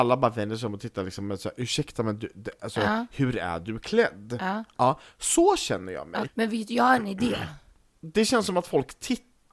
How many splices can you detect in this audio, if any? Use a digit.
1